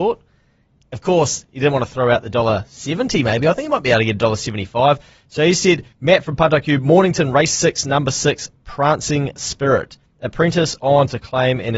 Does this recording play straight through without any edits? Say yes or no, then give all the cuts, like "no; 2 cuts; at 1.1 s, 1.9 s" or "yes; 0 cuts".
no; 1 cut; at 5.9 s